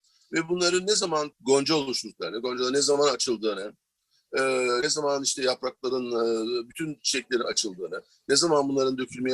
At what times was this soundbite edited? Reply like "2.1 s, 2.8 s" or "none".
none